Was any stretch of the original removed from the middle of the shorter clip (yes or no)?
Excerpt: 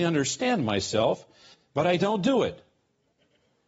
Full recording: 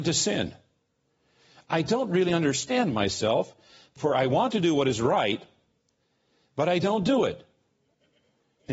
yes